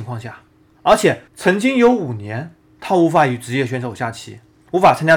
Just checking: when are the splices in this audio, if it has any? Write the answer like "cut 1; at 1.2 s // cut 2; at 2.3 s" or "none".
cut 1; at 1.3 s